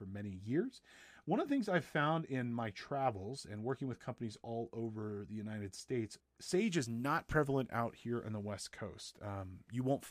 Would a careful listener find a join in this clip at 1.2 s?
no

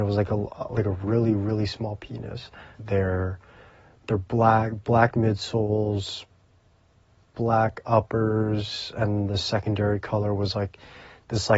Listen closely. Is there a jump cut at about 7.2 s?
no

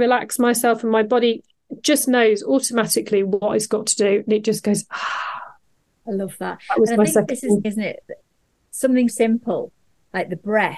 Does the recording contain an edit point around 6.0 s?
no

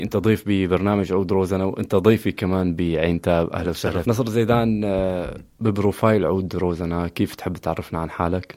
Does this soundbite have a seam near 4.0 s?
yes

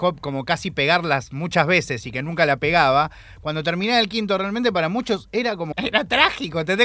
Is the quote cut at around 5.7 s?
yes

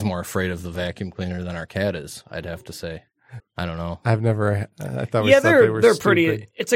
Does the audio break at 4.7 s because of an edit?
no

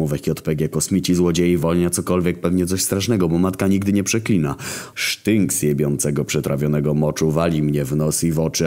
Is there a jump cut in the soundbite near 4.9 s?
yes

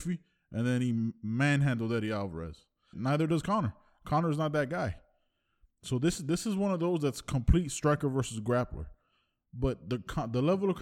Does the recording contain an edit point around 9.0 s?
no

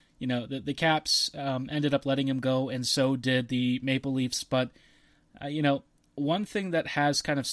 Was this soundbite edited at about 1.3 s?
no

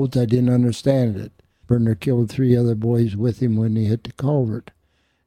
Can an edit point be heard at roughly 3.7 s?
no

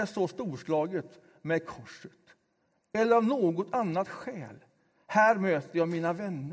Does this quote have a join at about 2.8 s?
no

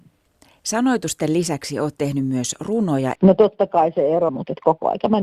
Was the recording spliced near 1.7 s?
no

